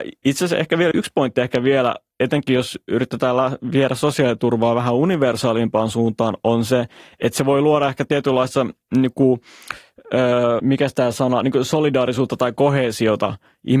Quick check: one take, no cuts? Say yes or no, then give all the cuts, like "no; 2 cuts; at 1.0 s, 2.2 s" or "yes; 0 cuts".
no; 2 cuts; at 0.9 s, 10.6 s